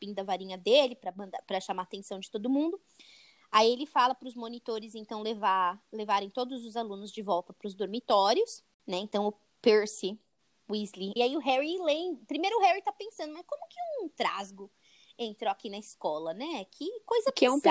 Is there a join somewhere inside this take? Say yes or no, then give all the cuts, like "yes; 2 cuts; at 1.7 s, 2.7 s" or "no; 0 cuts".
yes; 1 cut; at 11.2 s